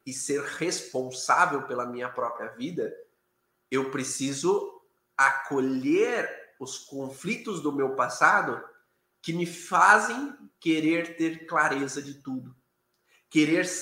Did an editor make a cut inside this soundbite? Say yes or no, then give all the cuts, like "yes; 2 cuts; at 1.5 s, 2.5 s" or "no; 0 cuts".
no; 0 cuts